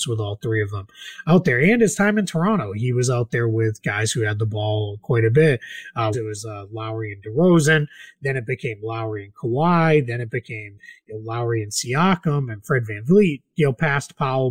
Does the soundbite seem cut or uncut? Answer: cut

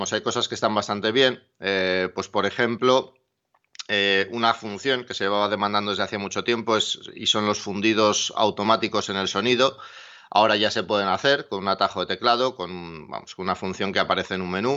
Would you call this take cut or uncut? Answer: uncut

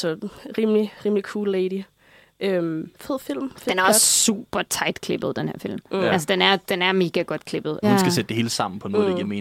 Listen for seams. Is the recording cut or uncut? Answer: cut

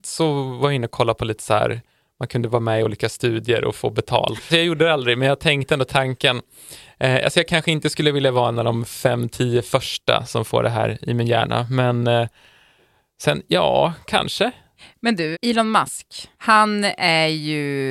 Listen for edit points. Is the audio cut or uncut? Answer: cut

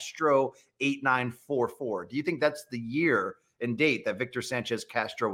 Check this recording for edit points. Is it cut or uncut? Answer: uncut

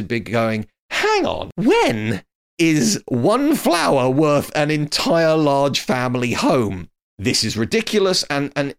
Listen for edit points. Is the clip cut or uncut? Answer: uncut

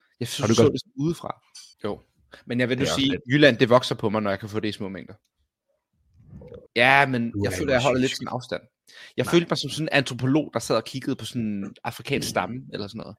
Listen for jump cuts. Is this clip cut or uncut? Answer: cut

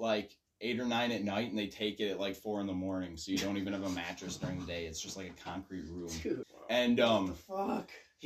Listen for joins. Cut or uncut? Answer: cut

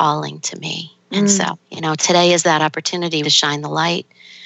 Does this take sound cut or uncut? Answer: cut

